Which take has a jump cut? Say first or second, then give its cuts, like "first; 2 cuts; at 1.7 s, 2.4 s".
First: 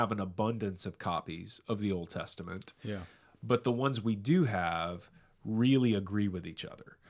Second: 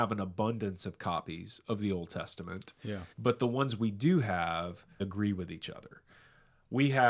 second; 2 cuts; at 3.1 s, 5.0 s